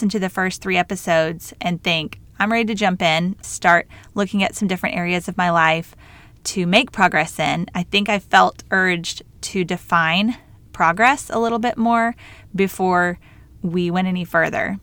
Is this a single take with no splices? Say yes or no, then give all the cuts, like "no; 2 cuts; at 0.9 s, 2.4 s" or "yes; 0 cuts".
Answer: no; 2 cuts; at 2.2 s, 3.4 s